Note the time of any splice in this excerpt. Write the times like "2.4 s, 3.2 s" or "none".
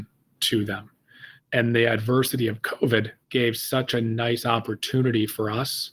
1.4 s, 3.2 s